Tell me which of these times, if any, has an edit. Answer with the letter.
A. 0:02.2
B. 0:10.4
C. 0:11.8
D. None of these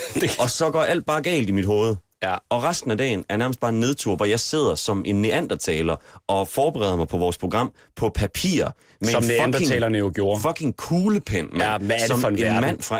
D